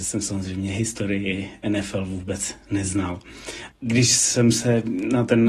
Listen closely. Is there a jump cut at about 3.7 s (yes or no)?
yes